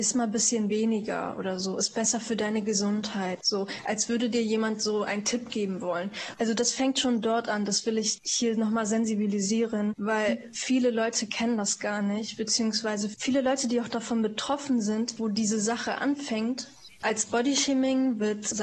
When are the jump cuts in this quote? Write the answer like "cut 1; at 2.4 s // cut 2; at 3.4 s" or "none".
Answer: cut 1; at 6.3 s // cut 2; at 15.2 s // cut 3; at 16.9 s